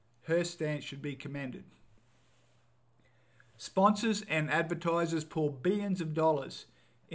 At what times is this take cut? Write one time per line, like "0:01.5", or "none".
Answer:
none